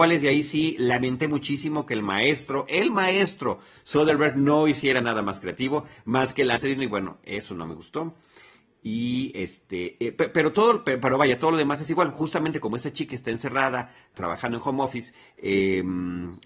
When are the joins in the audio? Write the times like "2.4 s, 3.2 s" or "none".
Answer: 6.6 s, 14.1 s